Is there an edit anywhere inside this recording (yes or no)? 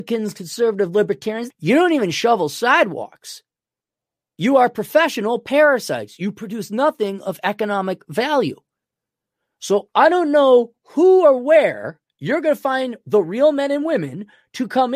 yes